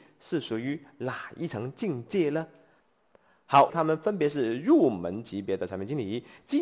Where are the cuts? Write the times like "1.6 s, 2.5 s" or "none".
3.7 s